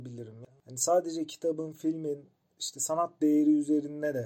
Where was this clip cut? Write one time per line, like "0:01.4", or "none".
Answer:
none